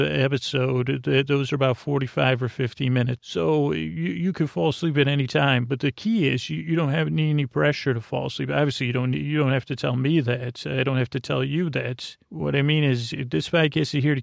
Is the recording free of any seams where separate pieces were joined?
no; 1 cut; at 3.2 s

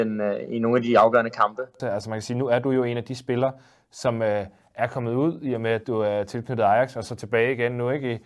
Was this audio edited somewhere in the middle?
yes; 1 cut; at 1.8 s

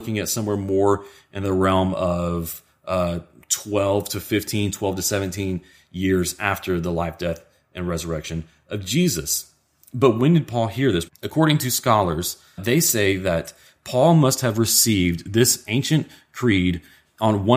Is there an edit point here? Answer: yes; 2 cuts; at 11.1 s, 12.6 s

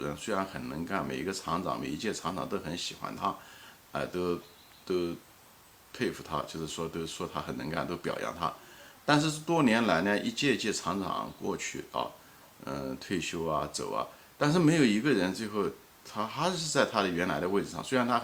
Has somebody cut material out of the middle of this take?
no; 0 cuts

